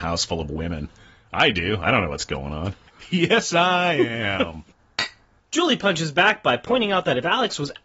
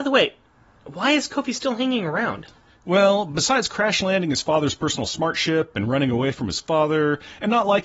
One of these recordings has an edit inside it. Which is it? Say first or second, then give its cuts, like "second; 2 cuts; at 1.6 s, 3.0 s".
first; 1 cut; at 2.9 s